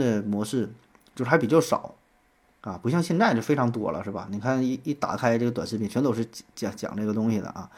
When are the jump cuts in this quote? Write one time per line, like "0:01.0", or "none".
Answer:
0:06.5